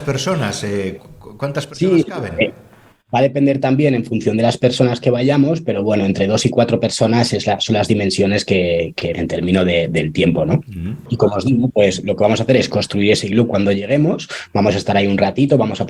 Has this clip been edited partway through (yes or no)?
yes